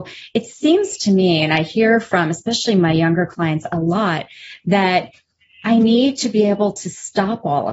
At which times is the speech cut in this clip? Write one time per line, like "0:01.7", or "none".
none